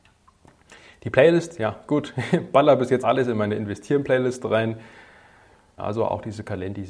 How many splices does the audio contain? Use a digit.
2